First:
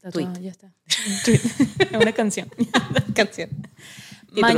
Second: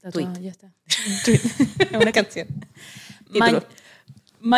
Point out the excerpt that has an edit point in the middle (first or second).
second